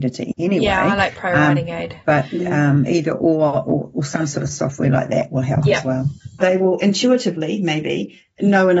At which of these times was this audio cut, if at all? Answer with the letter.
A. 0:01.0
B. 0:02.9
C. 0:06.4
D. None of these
C